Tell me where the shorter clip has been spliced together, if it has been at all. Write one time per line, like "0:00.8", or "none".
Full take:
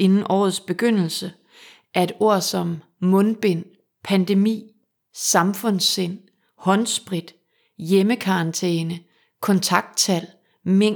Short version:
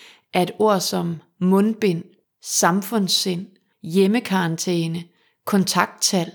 0:02.2
0:03.7